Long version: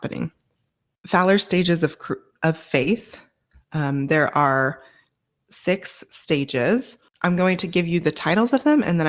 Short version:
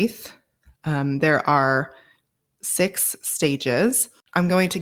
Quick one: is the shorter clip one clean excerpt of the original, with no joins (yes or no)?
yes